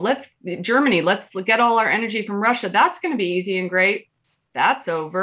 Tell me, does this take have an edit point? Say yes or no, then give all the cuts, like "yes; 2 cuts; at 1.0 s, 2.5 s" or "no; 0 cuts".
no; 0 cuts